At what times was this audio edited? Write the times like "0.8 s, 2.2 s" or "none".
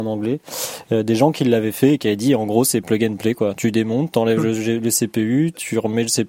none